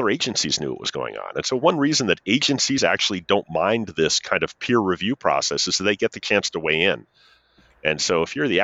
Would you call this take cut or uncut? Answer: uncut